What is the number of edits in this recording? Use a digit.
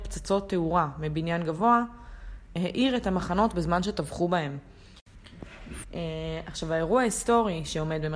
2